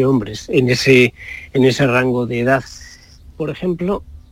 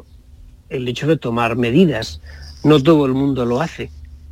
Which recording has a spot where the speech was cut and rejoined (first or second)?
first